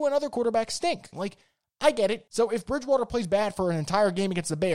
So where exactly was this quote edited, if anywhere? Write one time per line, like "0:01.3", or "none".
0:01.1
0:02.3